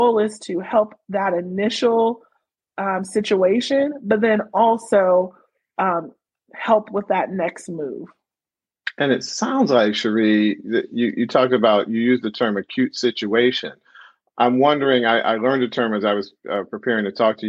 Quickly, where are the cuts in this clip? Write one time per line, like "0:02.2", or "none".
none

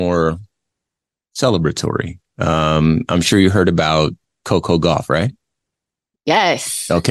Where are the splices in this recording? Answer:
none

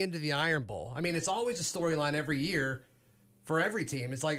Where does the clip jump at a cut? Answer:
none

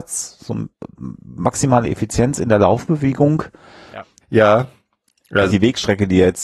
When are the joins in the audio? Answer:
0:04.2
0:05.5

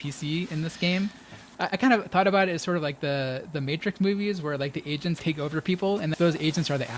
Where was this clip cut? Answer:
none

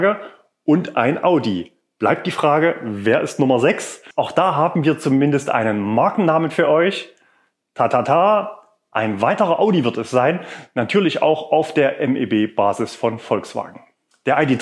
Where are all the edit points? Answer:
0:04.1

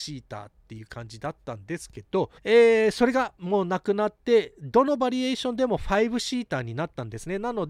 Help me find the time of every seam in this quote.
0:02.4

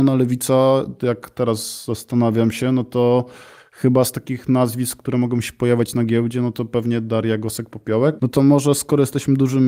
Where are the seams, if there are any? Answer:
0:08.2

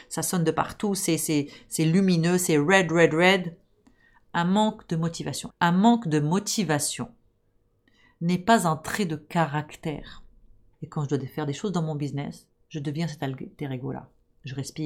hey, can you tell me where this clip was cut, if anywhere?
0:05.5
0:10.7

